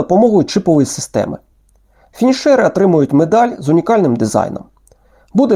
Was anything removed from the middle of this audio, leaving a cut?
no; 0 cuts

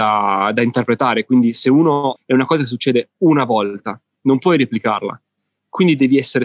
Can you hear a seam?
yes; 1 cut; at 2.2 s

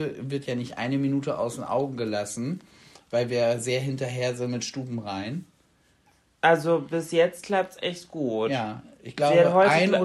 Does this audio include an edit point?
no; 0 cuts

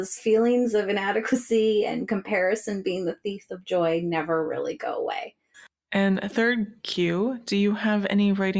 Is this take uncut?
no; 1 cut; at 5.5 s

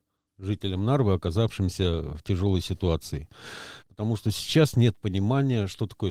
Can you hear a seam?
yes; 1 cut; at 3.8 s

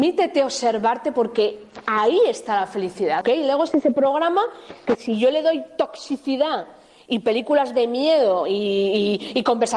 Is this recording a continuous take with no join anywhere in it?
no; 1 cut; at 3.2 s

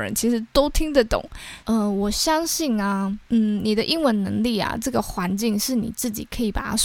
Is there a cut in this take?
yes; 1 cut; at 1.6 s

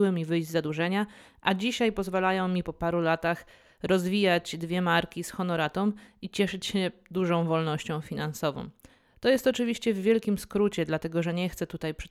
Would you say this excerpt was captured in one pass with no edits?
yes; 0 cuts

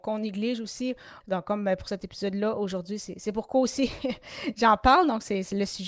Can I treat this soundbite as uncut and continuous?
no; 1 cut; at 1.2 s

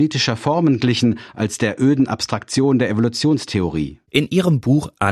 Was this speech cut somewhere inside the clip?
yes; 1 cut; at 4.1 s

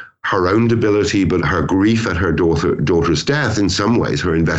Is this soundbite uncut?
no; 1 cut; at 1.4 s

